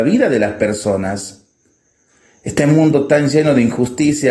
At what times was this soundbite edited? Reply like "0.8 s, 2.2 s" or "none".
none